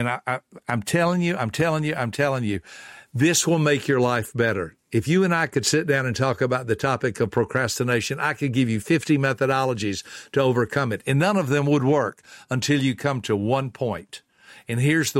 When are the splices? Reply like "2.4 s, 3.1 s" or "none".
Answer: none